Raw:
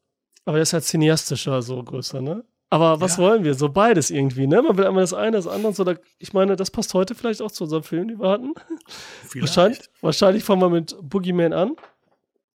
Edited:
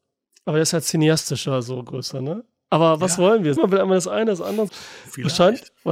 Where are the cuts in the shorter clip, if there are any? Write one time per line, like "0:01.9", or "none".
0:03.6
0:04.7